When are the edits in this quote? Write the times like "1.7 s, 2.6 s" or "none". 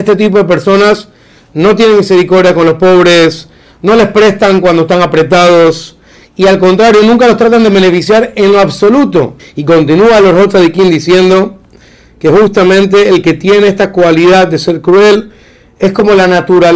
9.4 s